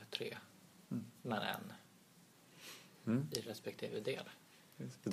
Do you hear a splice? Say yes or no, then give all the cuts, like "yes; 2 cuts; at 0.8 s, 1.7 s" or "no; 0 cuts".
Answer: no; 0 cuts